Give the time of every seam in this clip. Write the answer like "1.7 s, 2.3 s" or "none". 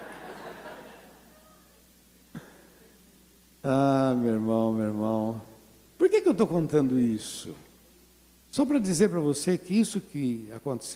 none